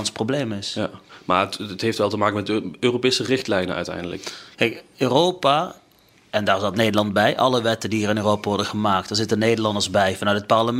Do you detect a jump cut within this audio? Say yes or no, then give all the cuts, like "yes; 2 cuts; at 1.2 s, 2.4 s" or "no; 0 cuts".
no; 0 cuts